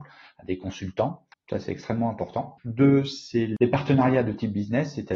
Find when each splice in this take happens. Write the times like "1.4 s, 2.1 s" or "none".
1.3 s, 2.6 s